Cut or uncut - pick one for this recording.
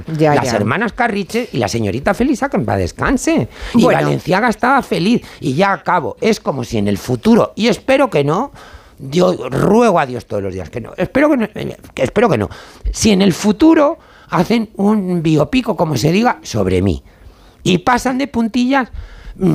uncut